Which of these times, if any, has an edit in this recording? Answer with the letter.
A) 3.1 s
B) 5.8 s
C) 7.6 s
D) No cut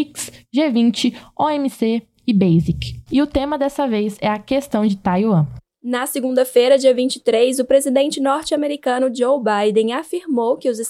A